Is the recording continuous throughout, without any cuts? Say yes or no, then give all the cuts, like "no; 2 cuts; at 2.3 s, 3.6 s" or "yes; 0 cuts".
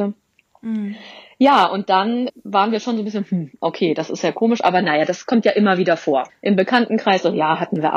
no; 2 cuts; at 2.3 s, 6.3 s